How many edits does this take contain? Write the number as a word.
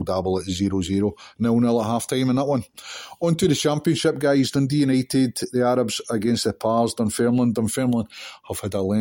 zero